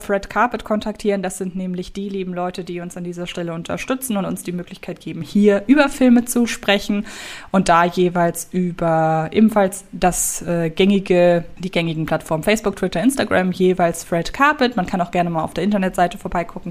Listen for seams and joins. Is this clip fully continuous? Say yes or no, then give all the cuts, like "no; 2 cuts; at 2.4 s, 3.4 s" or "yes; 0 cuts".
yes; 0 cuts